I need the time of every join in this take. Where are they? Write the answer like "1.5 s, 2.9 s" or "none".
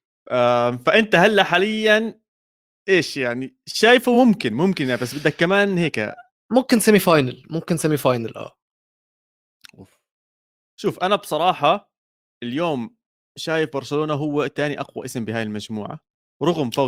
none